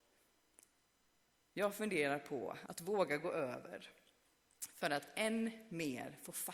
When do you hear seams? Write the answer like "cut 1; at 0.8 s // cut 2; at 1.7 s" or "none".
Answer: cut 1; at 2.7 s